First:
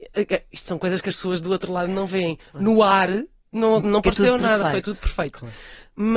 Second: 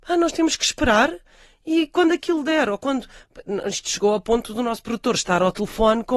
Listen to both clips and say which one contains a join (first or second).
first